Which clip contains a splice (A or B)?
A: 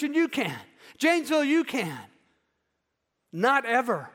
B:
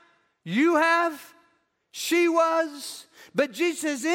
A